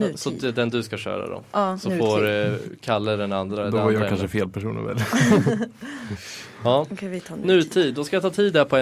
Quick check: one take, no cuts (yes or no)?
yes